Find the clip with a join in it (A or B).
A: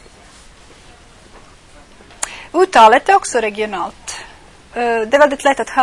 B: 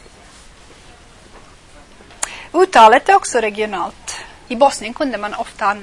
B